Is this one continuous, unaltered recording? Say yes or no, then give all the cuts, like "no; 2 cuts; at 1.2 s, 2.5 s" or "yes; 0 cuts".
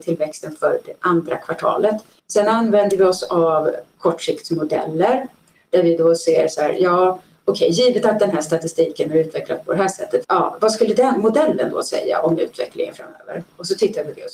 no; 2 cuts; at 2.2 s, 10.2 s